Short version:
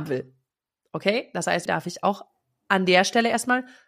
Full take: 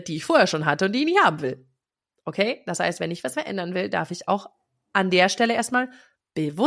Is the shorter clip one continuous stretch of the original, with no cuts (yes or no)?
no